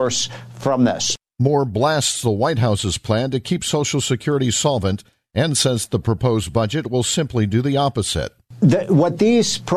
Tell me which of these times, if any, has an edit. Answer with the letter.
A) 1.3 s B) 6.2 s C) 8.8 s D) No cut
D